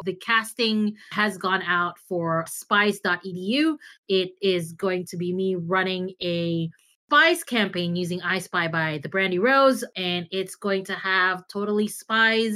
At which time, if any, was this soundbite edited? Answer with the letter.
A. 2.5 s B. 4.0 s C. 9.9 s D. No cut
A